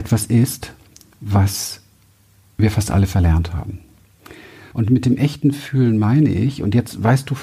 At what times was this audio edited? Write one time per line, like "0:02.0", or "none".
0:04.7

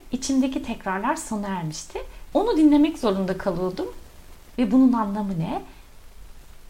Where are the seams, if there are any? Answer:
0:02.3
0:04.6

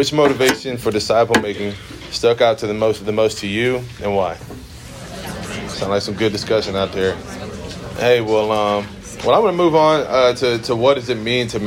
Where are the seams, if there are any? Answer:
0:05.7

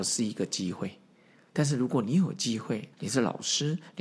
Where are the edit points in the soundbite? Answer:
0:02.9

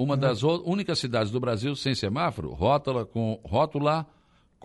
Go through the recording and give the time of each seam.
none

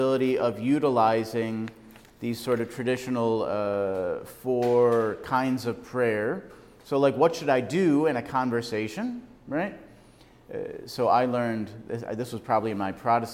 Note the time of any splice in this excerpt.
none

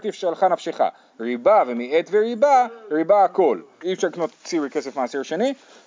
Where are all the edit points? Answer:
0:01.1
0:03.8

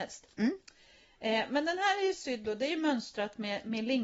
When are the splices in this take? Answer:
none

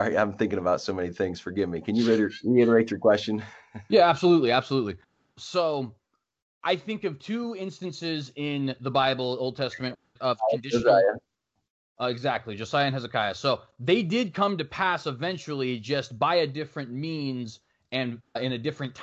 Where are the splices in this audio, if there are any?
none

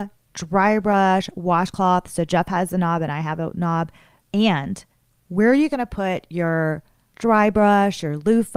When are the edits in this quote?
0:04.2

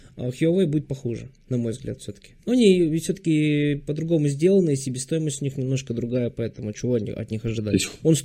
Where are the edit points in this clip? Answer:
none

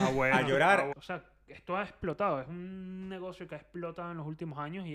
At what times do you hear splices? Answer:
0:00.9

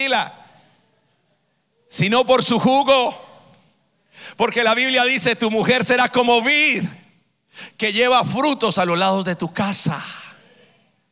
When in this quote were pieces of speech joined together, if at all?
none

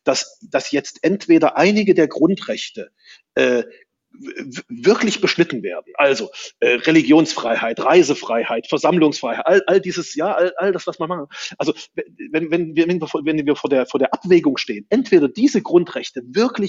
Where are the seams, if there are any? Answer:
none

